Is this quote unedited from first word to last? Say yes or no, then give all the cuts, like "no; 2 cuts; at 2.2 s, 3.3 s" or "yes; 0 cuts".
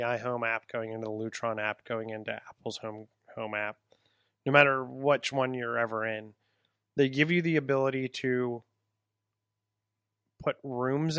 yes; 0 cuts